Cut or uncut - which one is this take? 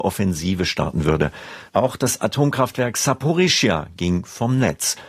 cut